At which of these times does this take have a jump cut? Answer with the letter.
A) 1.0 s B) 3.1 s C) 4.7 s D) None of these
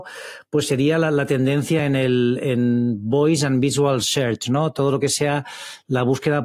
D